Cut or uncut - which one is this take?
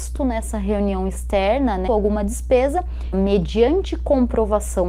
cut